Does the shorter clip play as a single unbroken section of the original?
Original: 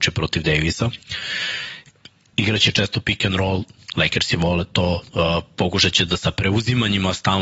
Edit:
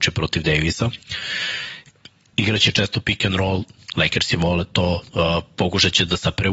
yes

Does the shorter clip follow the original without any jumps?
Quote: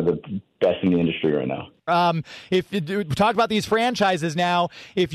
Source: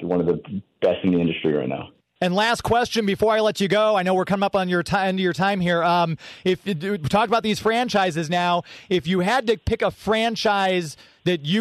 no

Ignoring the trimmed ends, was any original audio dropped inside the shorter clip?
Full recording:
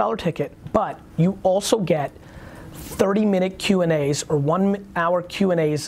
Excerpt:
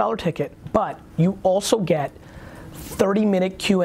no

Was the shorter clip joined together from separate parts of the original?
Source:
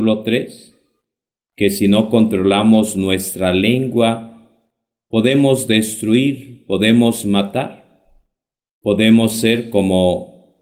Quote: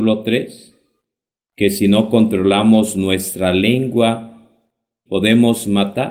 yes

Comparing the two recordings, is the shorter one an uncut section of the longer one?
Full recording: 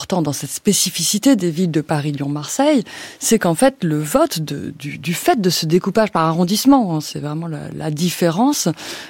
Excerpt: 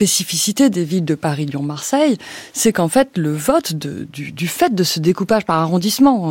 yes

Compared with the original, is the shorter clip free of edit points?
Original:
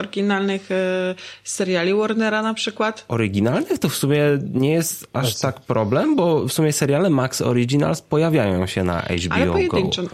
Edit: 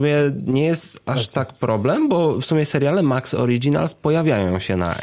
yes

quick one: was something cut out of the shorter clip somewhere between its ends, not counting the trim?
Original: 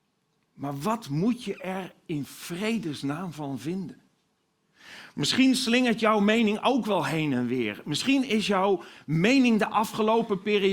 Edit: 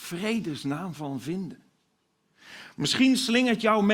no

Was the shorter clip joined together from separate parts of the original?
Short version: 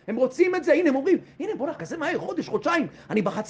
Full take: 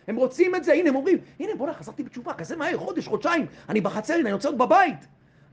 yes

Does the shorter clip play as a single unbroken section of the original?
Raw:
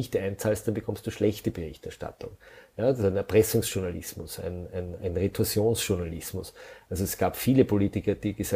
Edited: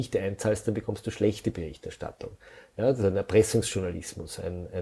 yes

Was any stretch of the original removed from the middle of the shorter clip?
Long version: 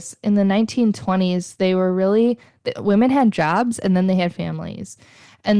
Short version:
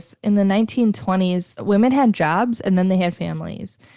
yes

